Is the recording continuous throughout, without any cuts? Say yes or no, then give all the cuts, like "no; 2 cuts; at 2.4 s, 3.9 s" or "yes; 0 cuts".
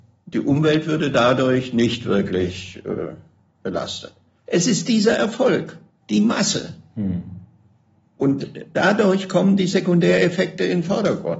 yes; 0 cuts